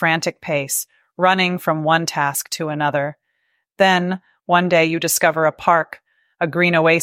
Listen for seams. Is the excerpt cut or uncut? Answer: uncut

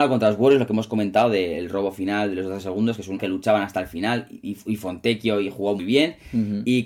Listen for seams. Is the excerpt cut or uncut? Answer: cut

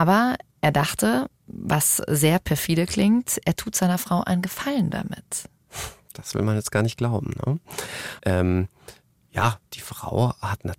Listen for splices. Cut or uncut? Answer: cut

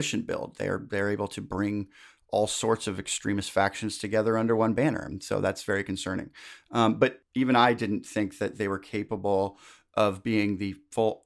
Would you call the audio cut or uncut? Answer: uncut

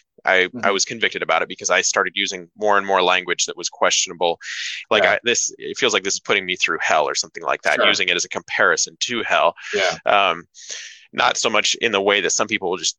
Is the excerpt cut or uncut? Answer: cut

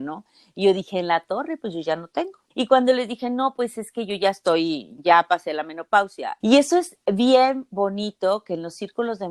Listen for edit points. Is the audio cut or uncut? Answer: cut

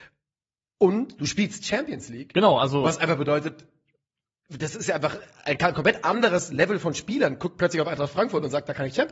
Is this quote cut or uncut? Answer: uncut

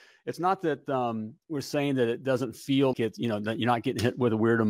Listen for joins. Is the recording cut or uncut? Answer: cut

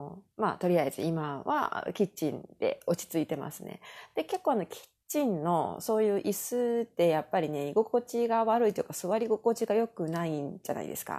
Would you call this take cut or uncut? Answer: uncut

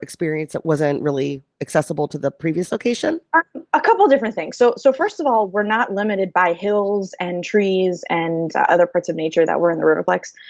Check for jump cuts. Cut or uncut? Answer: cut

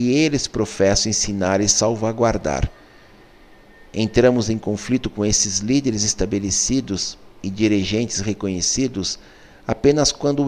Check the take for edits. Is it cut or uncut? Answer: uncut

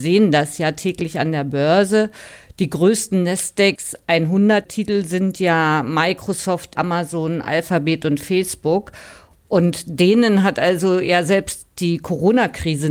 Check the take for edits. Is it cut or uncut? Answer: cut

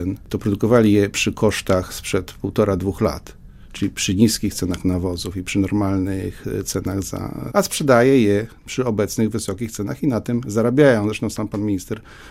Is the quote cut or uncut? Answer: cut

